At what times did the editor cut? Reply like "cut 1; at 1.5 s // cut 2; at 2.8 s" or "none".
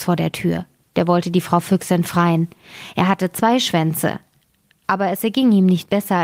none